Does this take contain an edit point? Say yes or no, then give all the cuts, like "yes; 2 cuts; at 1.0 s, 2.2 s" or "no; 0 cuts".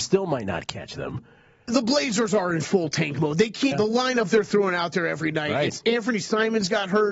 yes; 2 cuts; at 1.7 s, 3.7 s